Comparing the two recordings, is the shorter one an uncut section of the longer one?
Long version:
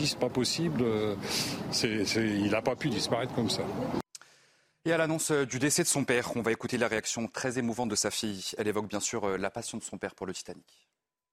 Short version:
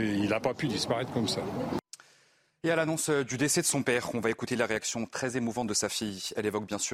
yes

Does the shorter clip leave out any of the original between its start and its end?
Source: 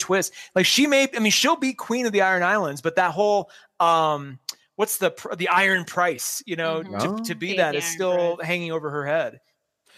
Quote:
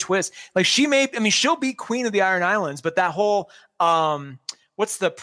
no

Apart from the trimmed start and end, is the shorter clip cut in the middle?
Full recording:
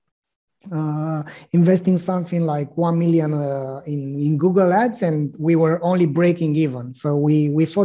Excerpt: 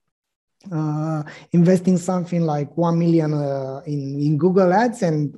no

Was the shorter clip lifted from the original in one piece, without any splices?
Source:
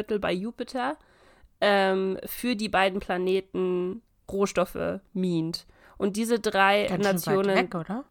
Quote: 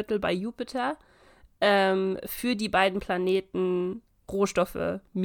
yes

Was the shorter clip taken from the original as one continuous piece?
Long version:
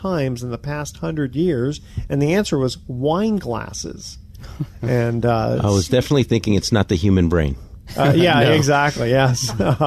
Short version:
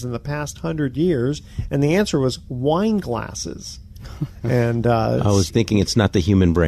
no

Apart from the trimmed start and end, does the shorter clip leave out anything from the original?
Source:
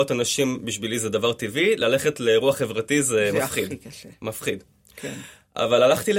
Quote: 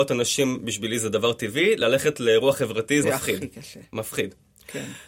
yes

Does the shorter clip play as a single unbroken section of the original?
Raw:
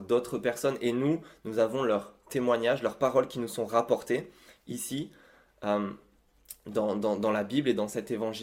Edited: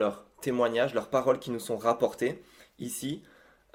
yes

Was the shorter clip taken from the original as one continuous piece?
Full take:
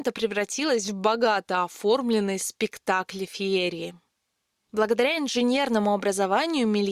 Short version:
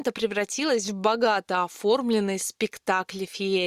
yes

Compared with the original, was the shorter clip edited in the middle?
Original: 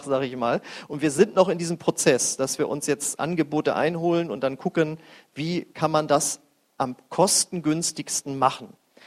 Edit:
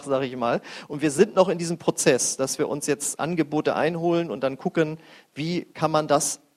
no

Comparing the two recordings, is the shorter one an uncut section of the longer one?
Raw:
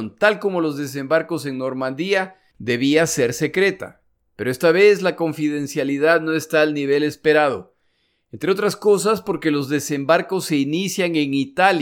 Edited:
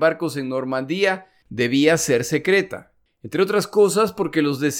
no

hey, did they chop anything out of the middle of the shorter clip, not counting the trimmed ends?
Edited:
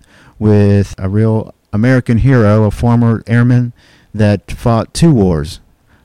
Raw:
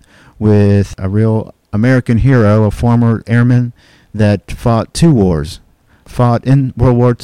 no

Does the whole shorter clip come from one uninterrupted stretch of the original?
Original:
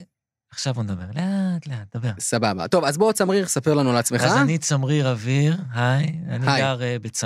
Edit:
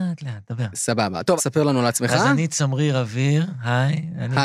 no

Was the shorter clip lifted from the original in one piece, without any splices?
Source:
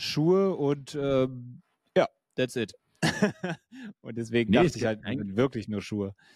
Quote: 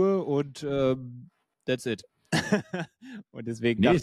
no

